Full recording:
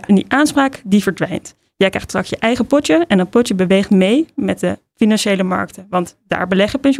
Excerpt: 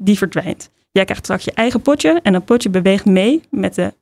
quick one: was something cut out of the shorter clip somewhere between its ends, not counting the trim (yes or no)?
no